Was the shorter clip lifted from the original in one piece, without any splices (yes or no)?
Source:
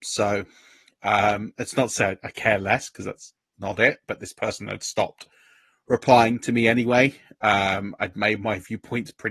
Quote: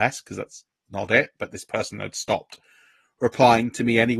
yes